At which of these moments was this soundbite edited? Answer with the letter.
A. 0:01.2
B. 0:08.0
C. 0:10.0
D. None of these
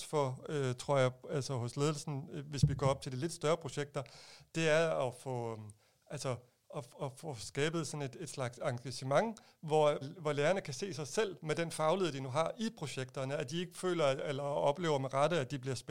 C